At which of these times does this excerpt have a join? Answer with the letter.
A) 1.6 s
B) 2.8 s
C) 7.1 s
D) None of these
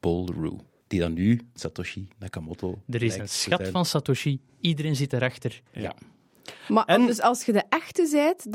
A